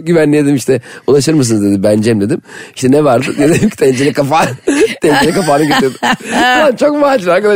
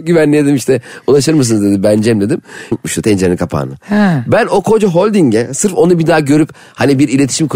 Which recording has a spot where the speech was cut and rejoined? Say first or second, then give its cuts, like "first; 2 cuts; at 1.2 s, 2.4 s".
second; 1 cut; at 2.7 s